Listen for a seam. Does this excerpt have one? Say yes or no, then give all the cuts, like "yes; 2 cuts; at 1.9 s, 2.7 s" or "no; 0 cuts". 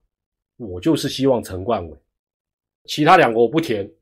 yes; 1 cut; at 2.9 s